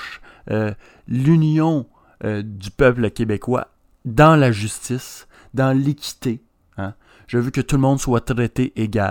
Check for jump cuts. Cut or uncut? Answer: uncut